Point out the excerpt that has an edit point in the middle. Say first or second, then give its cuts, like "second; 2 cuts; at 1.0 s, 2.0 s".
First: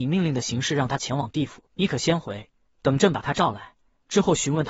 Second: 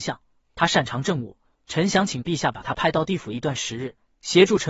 first; 1 cut; at 1.7 s